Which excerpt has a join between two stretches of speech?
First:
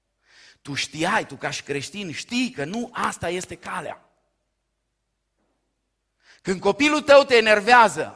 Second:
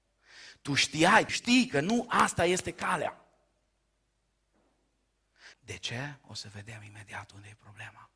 second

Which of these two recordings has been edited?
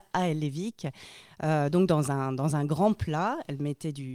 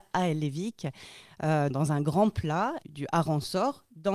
second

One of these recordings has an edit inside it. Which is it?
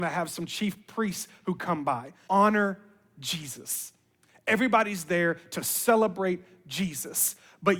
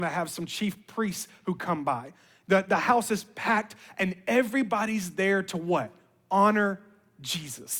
first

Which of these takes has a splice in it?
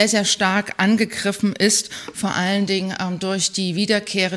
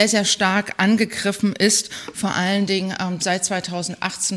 second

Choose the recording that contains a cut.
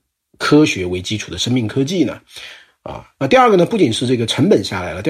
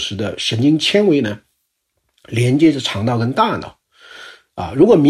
first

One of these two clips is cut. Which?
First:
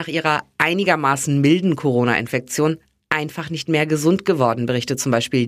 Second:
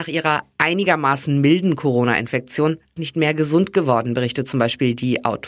second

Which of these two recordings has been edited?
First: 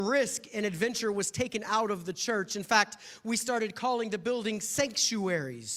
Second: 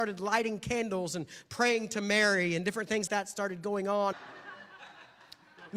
second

